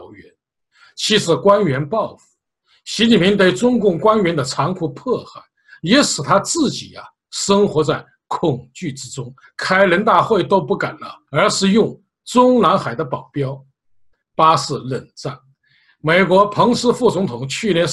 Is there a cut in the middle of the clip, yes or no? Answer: yes